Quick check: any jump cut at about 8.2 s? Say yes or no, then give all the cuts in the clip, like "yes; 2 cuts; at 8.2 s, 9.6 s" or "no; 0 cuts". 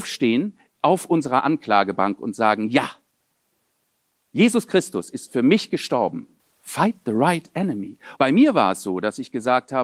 yes; 2 cuts; at 6.4 s, 8.2 s